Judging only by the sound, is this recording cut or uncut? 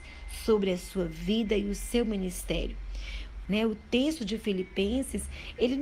cut